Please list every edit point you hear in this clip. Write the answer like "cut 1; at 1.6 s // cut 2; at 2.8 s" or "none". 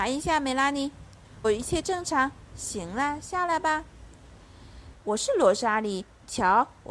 cut 1; at 1.4 s // cut 2; at 4.9 s